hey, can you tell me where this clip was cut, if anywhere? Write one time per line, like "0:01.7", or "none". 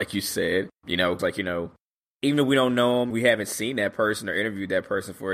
0:01.2
0:03.1